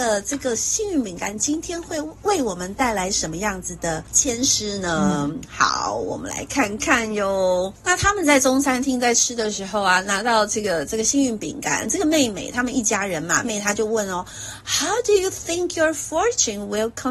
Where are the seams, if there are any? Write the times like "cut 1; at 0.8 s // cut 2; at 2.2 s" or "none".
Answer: cut 1; at 13.4 s

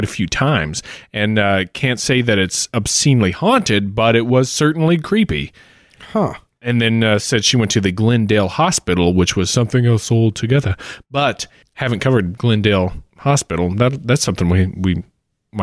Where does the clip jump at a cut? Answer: none

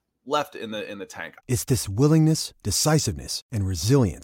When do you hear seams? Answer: cut 1; at 1.4 s

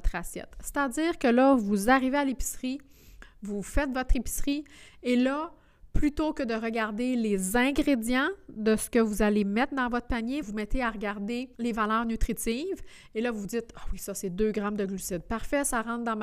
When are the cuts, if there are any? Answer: cut 1; at 10.4 s // cut 2; at 11.5 s

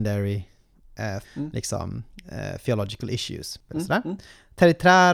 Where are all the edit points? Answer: cut 1; at 1.2 s // cut 2; at 3.7 s

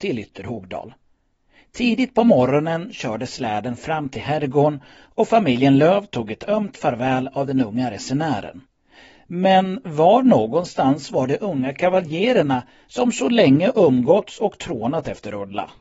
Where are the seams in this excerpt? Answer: none

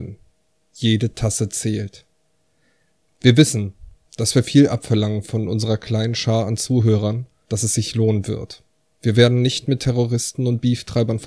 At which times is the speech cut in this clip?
cut 1; at 7.5 s

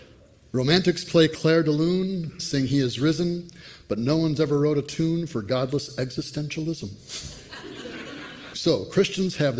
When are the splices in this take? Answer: cut 1; at 2.4 s // cut 2; at 8.5 s

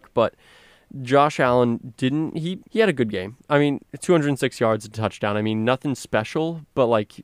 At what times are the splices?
cut 1; at 2.7 s

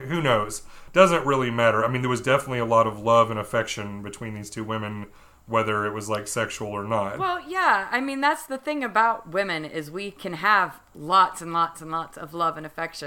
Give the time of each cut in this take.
none

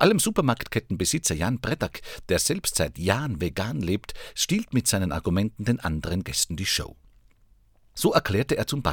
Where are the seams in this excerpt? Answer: none

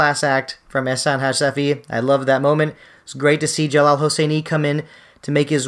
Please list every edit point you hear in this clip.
none

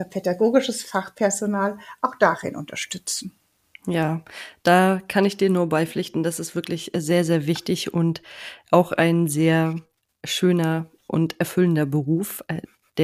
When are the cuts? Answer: none

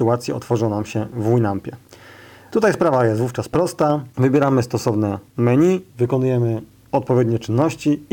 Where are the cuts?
cut 1; at 4.1 s // cut 2; at 5.9 s

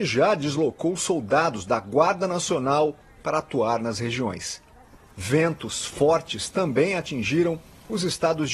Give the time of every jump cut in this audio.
none

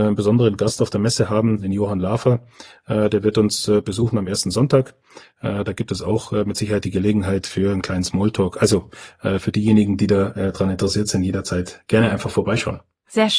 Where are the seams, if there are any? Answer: none

